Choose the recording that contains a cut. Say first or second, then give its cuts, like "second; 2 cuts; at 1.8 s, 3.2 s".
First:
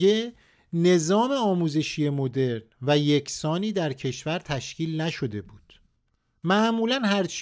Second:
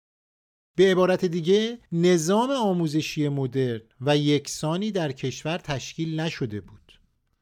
second; 1 cut; at 1.9 s